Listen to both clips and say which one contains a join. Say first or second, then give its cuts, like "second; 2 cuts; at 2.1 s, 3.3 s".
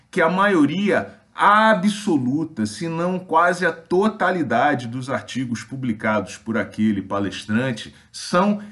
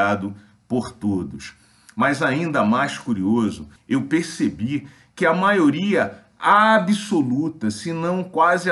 second; 1 cut; at 3.8 s